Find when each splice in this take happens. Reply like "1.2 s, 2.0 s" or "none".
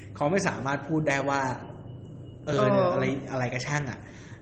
none